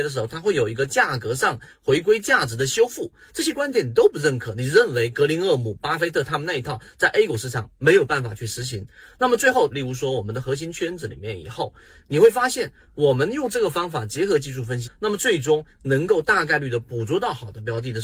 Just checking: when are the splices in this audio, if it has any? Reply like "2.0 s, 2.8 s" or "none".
9.7 s, 14.8 s